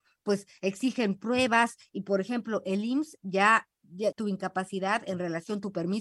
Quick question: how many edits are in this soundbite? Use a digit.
1